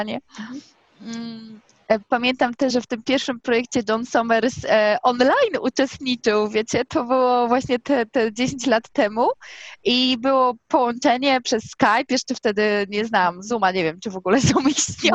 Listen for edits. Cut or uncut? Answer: cut